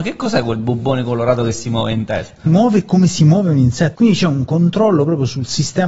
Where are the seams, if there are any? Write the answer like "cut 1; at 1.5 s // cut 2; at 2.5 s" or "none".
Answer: cut 1; at 2.5 s // cut 2; at 3.9 s